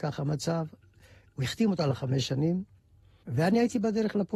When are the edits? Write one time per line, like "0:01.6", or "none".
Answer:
none